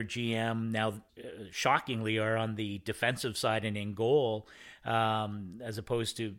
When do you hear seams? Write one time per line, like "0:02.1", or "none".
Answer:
0:01.1